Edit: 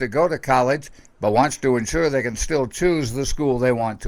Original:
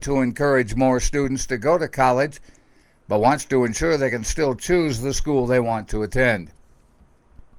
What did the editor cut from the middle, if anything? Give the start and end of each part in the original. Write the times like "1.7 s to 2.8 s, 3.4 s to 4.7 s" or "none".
2.6 s to 2.9 s